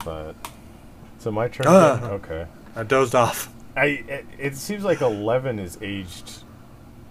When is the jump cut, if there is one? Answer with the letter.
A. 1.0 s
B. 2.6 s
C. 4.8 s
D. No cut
A